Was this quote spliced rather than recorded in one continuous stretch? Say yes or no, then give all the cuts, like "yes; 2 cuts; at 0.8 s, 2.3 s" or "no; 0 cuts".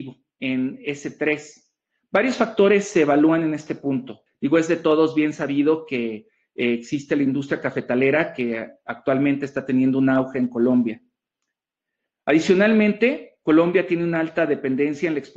yes; 1 cut; at 4.3 s